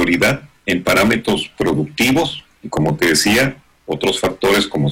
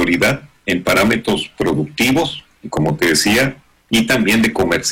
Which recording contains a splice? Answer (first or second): second